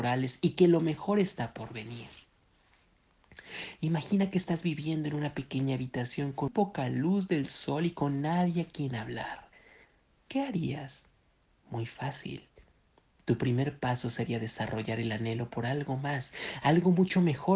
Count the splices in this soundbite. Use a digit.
2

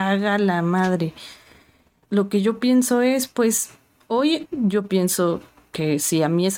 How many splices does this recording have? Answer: 2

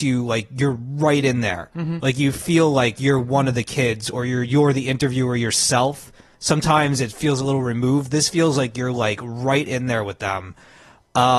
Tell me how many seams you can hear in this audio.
0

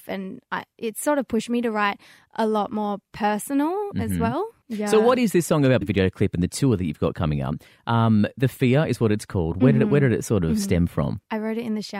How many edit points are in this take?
1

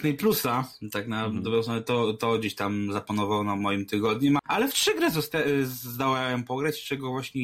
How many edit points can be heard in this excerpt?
1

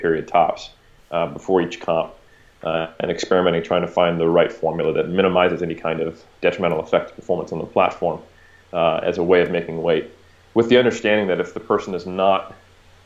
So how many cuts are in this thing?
0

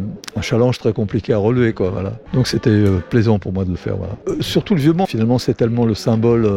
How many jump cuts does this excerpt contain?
2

